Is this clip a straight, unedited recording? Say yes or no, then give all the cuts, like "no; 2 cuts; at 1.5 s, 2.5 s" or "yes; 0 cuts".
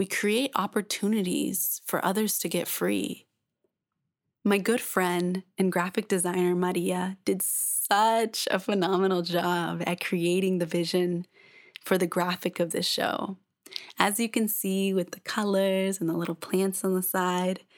yes; 0 cuts